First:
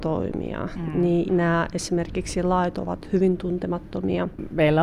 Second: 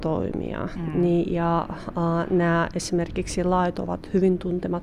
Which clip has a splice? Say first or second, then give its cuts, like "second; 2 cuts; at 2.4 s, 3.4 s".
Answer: first; 1 cut; at 1.3 s